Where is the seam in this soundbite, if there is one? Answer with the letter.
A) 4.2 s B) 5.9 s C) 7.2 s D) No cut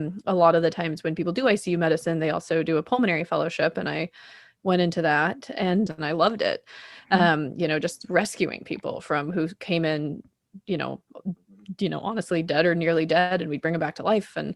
B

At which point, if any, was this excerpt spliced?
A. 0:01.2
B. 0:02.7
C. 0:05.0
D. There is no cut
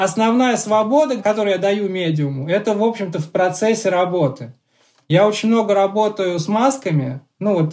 D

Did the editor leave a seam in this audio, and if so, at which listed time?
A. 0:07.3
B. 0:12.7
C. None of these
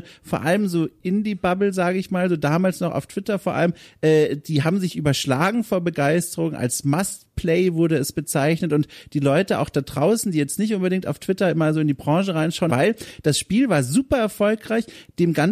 B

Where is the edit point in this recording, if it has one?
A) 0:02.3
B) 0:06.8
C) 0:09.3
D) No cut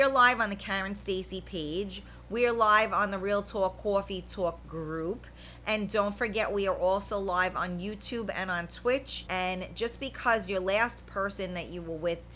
C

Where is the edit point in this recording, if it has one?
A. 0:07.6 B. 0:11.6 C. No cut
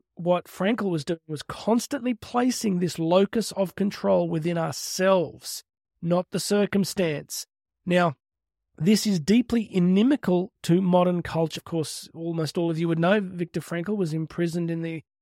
B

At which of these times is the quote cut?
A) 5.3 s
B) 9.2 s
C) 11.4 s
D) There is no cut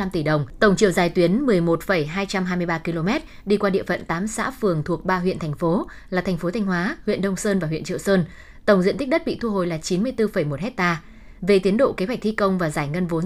D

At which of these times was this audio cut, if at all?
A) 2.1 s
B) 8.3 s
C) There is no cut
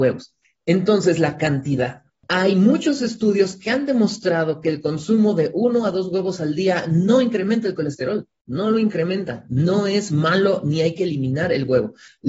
C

